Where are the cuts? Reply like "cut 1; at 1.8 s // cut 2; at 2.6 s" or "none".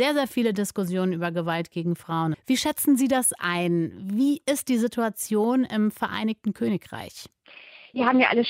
cut 1; at 2.3 s